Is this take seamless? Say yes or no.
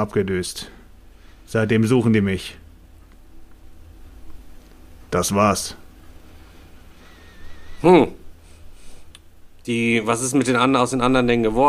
yes